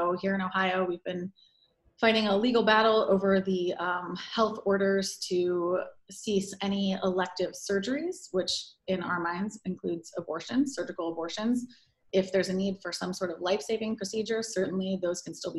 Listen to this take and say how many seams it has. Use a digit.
0